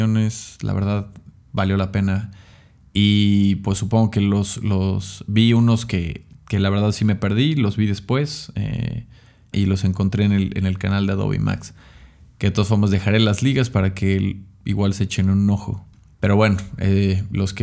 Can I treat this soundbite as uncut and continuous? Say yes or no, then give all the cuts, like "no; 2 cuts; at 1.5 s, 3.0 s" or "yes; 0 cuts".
no; 2 cuts; at 9.5 s, 16.1 s